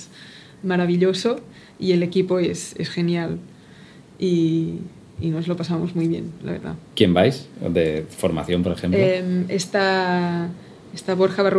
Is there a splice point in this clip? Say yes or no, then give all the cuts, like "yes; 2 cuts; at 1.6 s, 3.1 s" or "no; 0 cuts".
no; 0 cuts